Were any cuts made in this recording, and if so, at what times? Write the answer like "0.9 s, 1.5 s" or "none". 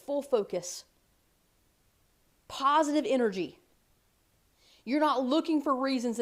none